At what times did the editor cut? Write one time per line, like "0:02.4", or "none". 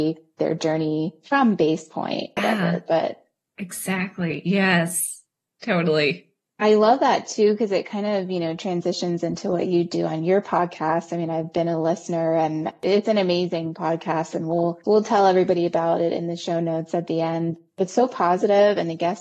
0:02.4